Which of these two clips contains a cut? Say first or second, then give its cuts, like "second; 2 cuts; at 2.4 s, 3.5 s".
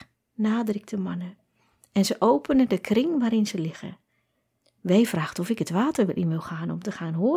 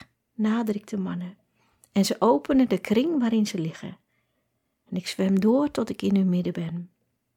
first; 1 cut; at 4.6 s